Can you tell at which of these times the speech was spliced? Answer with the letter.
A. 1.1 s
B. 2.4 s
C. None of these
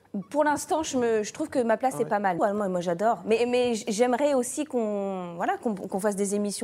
B